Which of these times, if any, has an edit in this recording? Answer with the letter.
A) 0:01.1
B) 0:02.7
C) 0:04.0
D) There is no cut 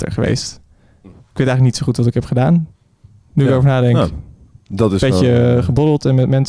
A